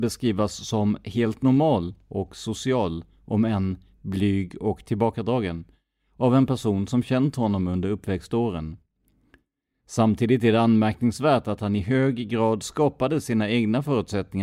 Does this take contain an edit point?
no; 0 cuts

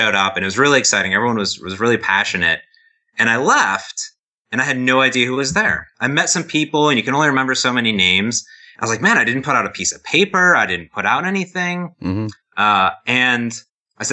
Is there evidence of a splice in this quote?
no; 0 cuts

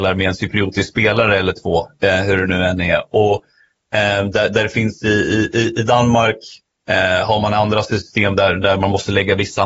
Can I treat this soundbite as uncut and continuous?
yes; 0 cuts

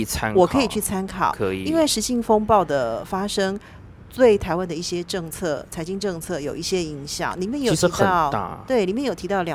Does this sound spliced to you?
no; 0 cuts

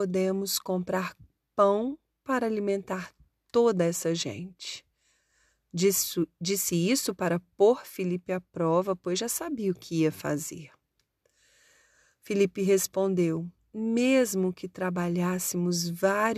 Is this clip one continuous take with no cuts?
yes; 0 cuts

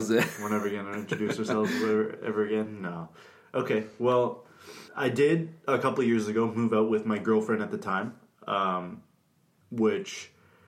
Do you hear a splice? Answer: no; 0 cuts

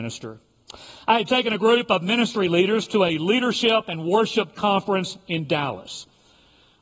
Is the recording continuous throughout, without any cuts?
yes; 0 cuts

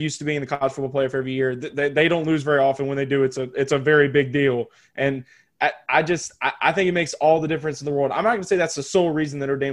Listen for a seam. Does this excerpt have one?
no; 0 cuts

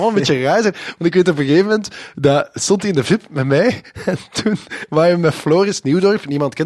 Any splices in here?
no; 0 cuts

